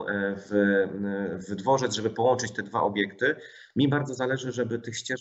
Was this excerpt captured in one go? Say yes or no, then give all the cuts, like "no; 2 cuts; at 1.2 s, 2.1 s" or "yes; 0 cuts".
yes; 0 cuts